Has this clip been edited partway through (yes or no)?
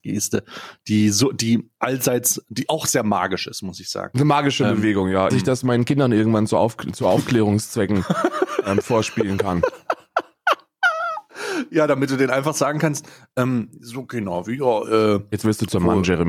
yes